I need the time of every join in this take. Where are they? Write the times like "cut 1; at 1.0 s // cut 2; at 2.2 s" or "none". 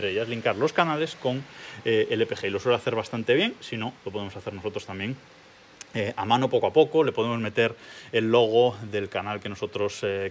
none